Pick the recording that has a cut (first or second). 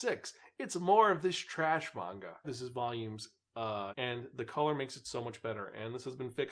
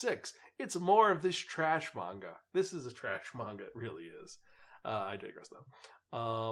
first